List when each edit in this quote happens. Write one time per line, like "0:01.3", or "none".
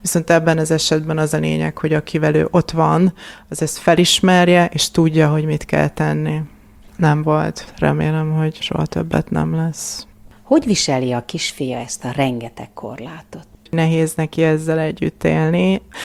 0:06.9
0:13.6